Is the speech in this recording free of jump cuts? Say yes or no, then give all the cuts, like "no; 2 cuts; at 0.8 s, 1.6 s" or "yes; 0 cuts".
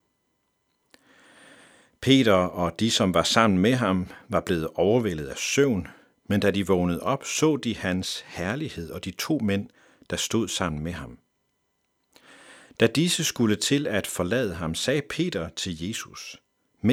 yes; 0 cuts